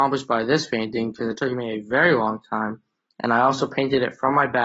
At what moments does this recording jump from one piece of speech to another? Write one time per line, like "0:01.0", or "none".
none